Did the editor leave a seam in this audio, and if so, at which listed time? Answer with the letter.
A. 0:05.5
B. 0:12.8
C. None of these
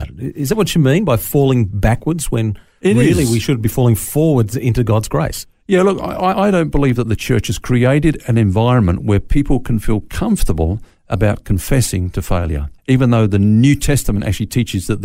B